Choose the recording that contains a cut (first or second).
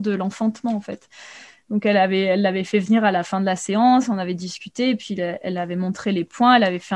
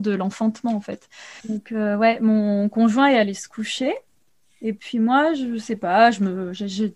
second